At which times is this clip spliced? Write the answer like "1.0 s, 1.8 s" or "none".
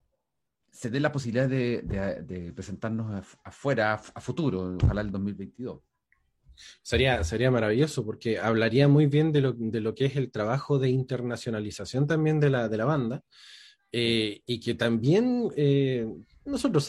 none

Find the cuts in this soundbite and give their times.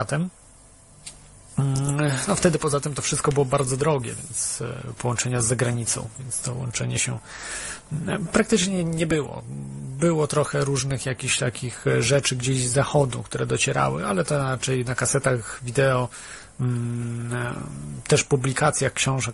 none

